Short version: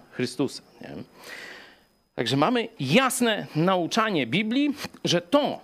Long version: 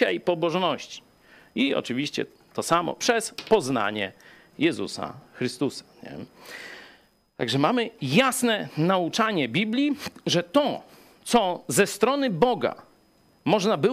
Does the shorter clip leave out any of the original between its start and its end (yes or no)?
no